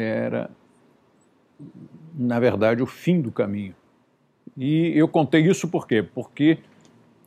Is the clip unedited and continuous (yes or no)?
yes